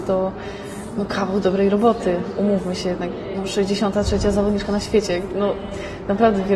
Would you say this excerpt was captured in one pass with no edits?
yes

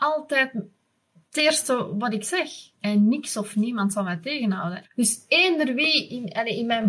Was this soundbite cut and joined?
yes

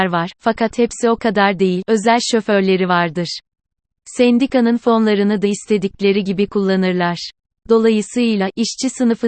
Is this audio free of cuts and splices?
no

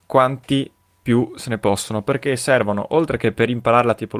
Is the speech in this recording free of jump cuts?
yes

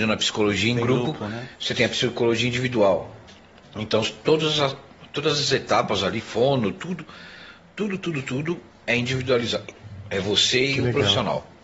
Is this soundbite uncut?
yes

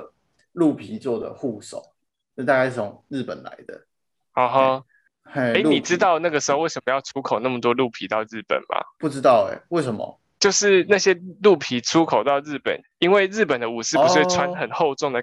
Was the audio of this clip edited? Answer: yes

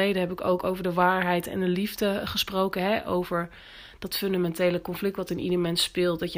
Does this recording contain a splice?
no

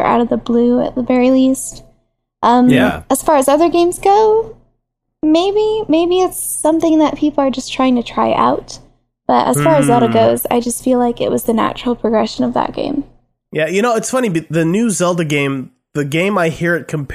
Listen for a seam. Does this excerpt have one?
no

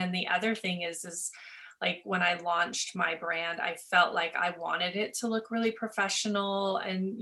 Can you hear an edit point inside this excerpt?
no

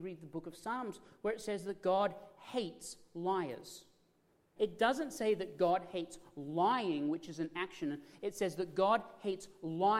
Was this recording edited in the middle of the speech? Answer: yes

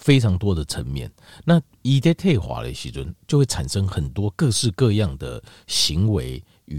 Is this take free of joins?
yes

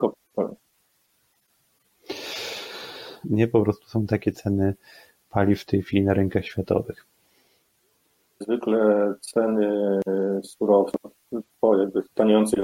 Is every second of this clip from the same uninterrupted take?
no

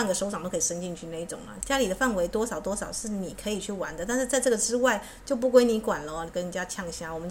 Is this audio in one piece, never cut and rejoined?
no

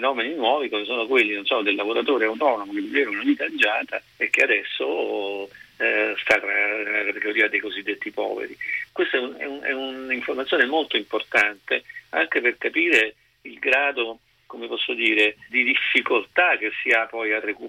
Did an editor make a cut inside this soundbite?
yes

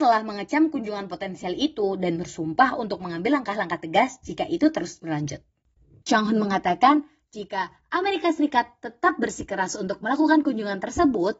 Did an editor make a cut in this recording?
yes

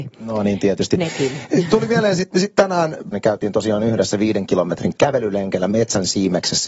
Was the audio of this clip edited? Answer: yes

